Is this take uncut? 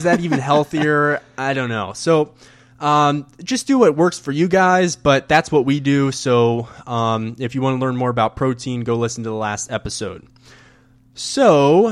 yes; 0 cuts

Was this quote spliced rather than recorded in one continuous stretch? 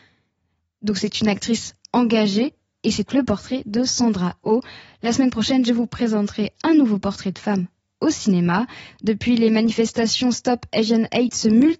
yes; 2 cuts; at 3.1 s, 8.9 s

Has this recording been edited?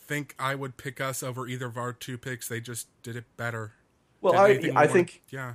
no; 0 cuts

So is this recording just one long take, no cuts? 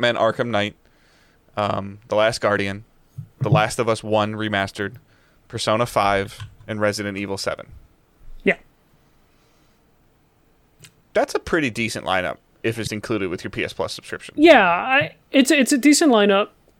no; 2 cuts; at 12.9 s, 15.2 s

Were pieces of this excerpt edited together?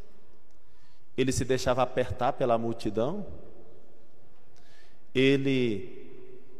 no; 0 cuts

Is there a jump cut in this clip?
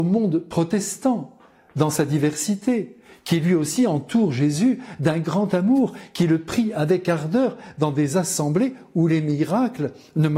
no; 0 cuts

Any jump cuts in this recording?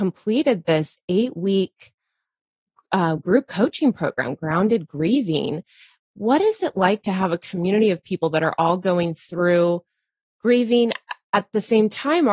no; 0 cuts

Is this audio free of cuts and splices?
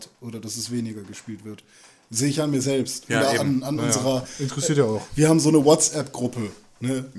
yes; 0 cuts

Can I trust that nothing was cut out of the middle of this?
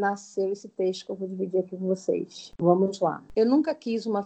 yes; 0 cuts

